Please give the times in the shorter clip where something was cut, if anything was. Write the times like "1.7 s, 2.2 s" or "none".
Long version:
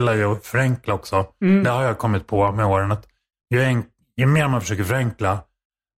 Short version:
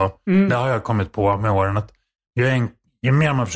none

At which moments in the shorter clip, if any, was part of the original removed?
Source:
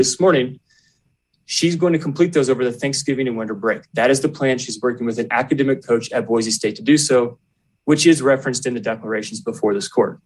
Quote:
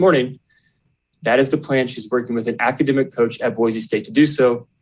1.2 s

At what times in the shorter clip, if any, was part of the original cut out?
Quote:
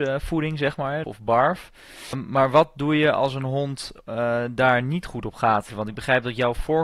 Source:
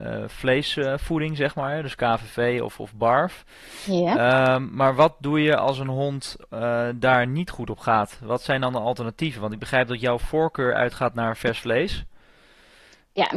1.0 s, 2.1 s, 5.7 s

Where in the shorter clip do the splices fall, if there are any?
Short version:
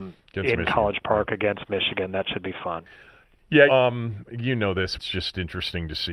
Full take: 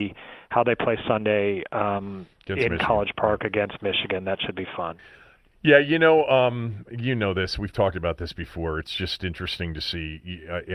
3.7 s, 5.0 s

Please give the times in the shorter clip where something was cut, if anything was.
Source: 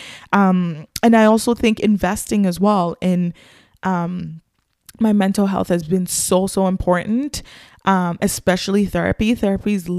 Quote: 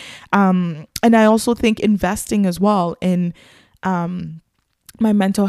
none

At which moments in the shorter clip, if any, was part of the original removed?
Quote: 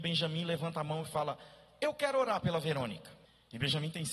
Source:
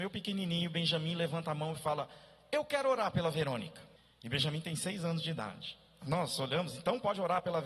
none

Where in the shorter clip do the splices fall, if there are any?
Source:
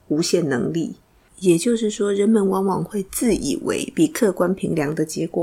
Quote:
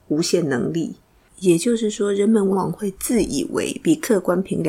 2.5 s

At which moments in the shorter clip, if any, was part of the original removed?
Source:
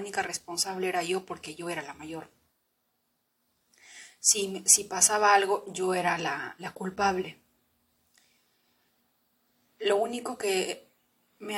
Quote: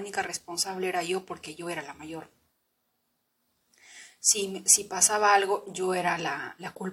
none

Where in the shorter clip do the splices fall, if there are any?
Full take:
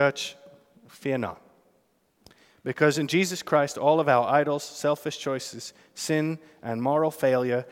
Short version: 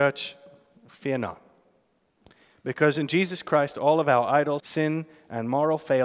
4.6 s

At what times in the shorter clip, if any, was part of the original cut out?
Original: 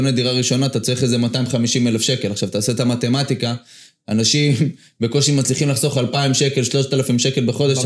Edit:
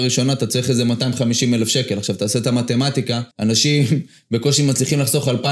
3.3 s

